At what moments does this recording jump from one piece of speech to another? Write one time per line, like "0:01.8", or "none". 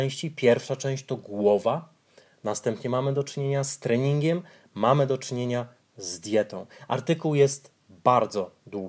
0:07.8